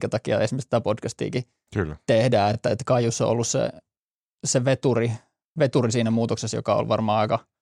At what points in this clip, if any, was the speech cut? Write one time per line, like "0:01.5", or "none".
none